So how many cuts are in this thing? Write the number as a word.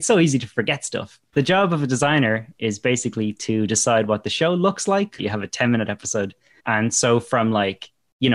three